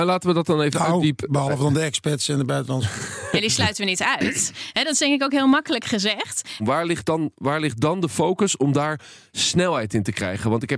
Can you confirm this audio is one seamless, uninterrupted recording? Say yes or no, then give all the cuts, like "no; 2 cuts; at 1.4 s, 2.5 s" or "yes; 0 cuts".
no; 1 cut; at 6.6 s